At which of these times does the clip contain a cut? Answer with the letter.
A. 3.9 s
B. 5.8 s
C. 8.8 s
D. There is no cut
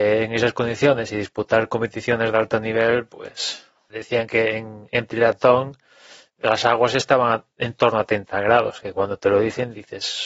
A